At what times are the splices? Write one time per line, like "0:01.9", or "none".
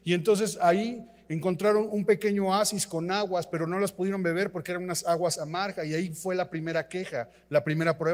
none